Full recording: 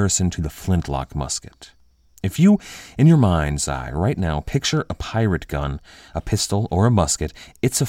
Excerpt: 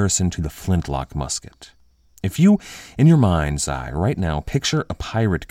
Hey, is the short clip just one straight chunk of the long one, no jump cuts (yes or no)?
yes